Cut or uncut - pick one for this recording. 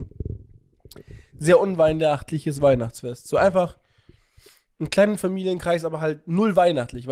uncut